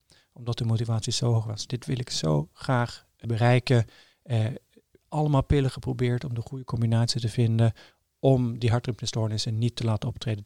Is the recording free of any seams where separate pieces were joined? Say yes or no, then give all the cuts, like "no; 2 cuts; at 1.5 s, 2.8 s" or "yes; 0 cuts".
no; 1 cut; at 3.2 s